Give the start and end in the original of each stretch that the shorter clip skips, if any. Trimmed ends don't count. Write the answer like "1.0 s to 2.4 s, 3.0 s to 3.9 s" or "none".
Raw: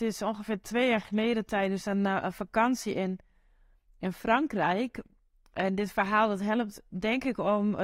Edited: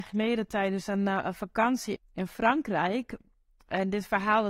2.9 s to 3.8 s